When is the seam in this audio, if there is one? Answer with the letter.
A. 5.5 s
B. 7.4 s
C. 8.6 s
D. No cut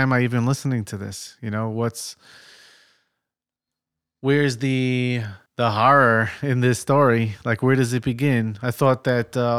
A